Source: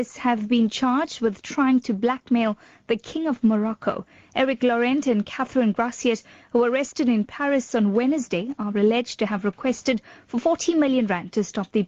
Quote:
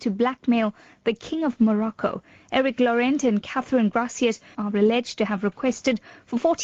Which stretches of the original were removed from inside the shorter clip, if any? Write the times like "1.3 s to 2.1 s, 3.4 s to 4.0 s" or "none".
6.4 s to 8.6 s